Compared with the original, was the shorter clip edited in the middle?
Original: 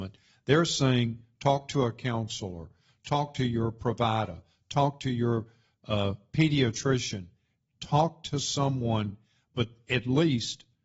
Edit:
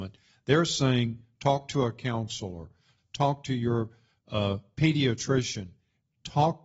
yes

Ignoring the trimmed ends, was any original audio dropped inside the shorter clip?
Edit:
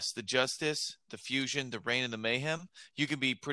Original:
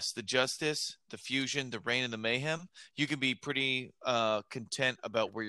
no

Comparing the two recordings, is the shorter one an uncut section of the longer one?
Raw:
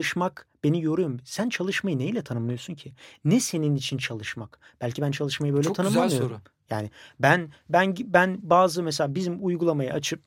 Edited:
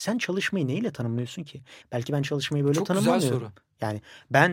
no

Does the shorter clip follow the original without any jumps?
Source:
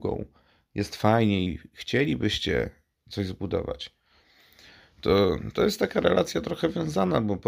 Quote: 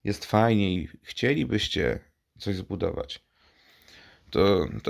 yes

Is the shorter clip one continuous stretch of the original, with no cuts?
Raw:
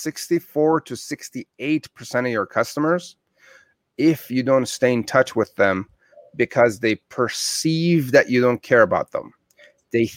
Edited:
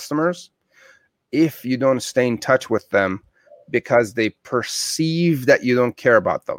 yes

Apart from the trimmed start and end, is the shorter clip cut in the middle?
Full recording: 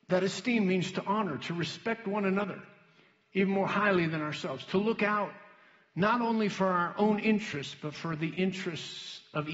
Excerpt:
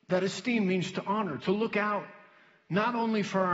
yes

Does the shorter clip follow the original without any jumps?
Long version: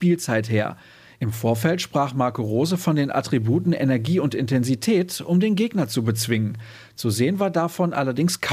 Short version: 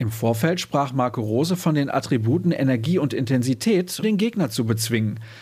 no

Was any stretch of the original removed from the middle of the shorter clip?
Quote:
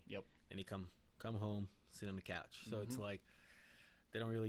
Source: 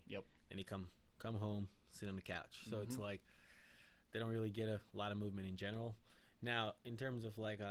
no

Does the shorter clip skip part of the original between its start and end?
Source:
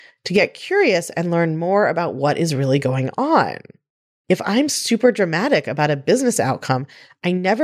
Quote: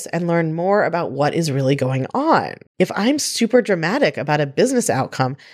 yes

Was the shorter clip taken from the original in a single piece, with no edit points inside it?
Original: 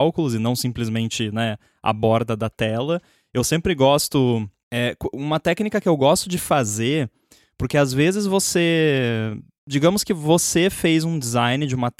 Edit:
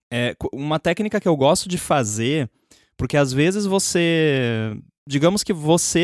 yes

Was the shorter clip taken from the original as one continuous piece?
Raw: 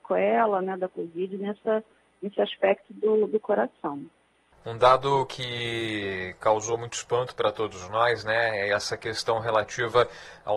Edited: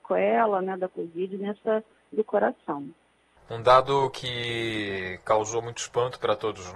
no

